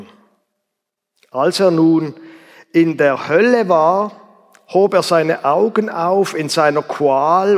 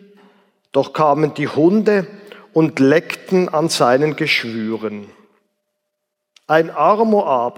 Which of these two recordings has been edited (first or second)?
second